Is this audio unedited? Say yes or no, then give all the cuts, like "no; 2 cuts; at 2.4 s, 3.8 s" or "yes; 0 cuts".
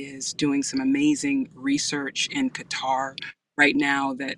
yes; 0 cuts